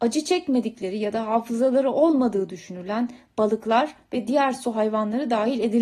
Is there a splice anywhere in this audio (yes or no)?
no